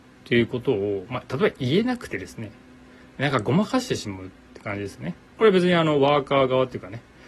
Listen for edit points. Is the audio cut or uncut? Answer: uncut